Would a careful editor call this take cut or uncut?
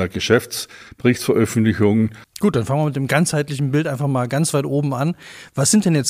cut